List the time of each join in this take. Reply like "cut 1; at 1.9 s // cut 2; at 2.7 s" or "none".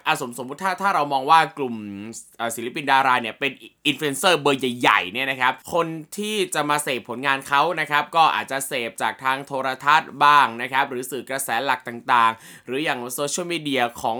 cut 1; at 5.6 s